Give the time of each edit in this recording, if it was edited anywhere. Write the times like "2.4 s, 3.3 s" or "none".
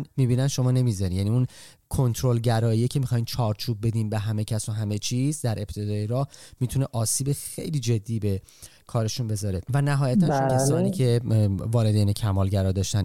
10.5 s